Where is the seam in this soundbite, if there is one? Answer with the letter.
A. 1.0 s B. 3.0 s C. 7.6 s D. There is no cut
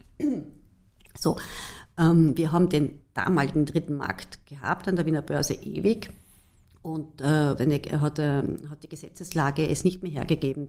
C